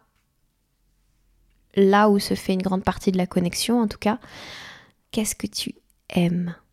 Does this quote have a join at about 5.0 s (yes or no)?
yes